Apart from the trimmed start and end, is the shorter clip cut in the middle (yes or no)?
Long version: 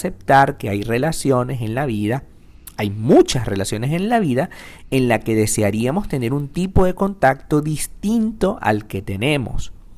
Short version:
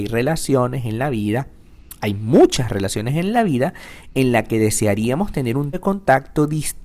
yes